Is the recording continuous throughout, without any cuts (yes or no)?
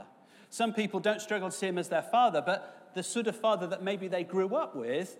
yes